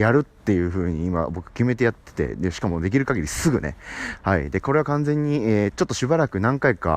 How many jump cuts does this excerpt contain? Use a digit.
2